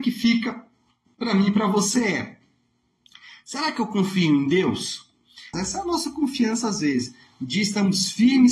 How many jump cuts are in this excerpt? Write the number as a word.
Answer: one